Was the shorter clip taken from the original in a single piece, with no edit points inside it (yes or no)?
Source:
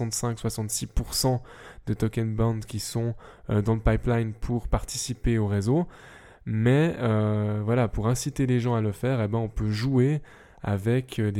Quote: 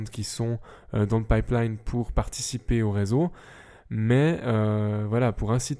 yes